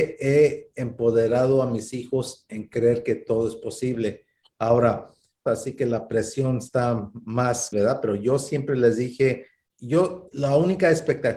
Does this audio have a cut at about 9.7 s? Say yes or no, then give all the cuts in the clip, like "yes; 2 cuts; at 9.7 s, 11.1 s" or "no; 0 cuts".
yes; 3 cuts; at 5.5 s, 7.7 s, 9.7 s